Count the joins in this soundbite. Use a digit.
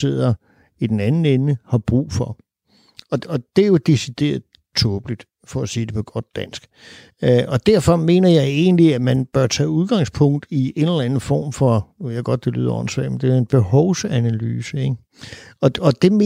0